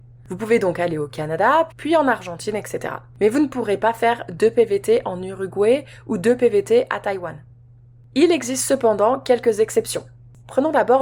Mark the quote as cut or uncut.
cut